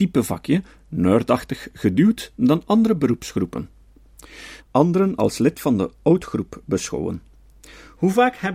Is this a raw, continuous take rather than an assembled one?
no; 1 cut; at 4.6 s

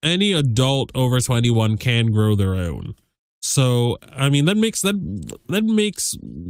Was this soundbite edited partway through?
yes; 1 cut; at 3.3 s

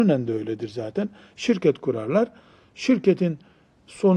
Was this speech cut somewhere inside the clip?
no; 0 cuts

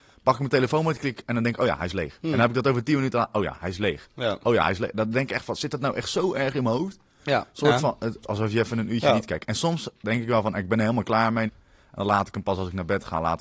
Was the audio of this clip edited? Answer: yes; 2 cuts; at 8.2 s, 11.5 s

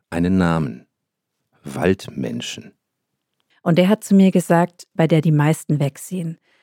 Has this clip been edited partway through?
yes; 2 cuts; at 3.5 s, 5.0 s

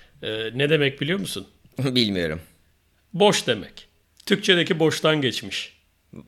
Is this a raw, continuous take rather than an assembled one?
yes; 0 cuts

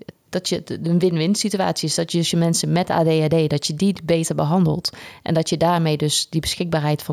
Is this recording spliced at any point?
no; 0 cuts

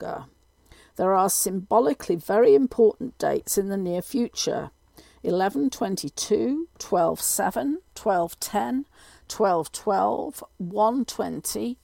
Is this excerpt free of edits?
yes; 0 cuts

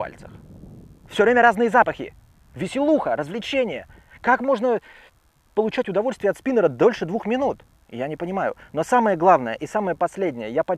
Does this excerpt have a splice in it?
yes; 1 cut; at 1.0 s

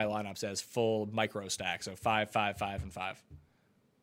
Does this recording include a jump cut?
no; 0 cuts

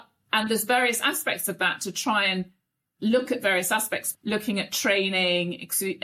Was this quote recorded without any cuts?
no; 2 cuts; at 3.0 s, 4.1 s

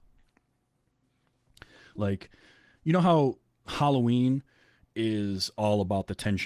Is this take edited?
no; 0 cuts

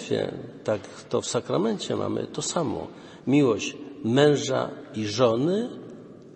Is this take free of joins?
yes; 0 cuts

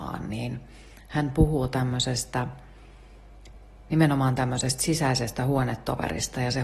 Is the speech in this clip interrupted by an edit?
no; 0 cuts

